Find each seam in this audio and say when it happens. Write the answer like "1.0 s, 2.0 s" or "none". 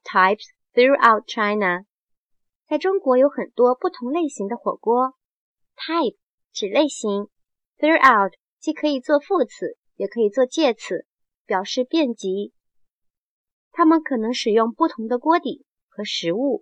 13.5 s